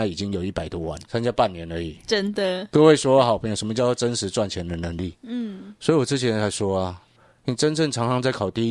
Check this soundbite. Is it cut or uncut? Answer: cut